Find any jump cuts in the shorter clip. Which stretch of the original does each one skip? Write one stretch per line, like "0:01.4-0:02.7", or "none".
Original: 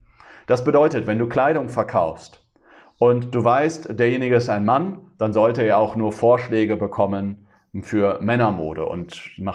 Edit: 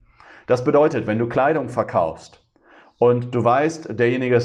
none